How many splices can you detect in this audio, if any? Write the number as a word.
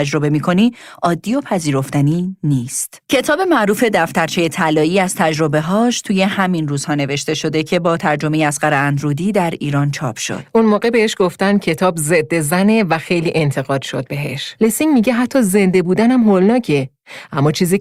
two